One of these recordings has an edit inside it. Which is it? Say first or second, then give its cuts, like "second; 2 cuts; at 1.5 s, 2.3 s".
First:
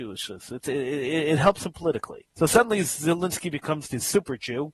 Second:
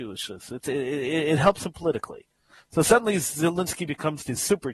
first; 1 cut; at 2.3 s